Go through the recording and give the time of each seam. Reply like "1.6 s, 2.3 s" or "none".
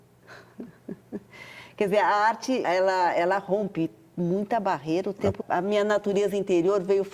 2.6 s, 5.4 s

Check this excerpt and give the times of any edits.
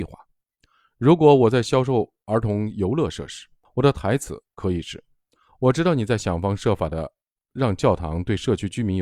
3.6 s

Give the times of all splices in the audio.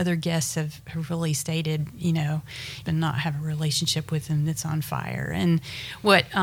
2.8 s

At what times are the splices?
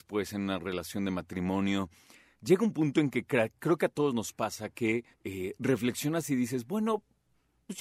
5.1 s

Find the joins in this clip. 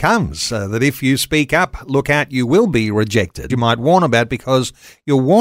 3.5 s

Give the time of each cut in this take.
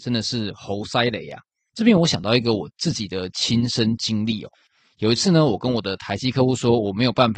1.7 s

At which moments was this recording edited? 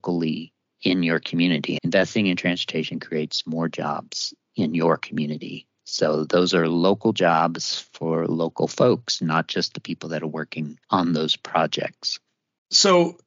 1.8 s, 10.8 s

